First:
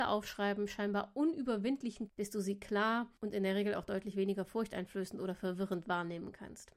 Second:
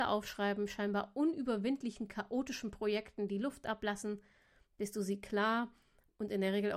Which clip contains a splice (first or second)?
first